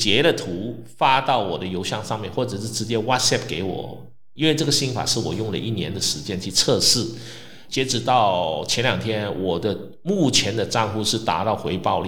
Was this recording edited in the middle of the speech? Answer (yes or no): yes